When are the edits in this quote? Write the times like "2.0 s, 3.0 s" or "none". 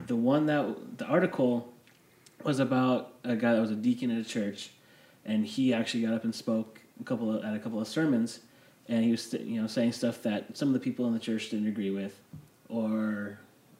none